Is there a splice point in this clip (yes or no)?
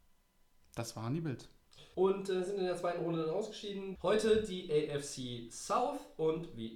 yes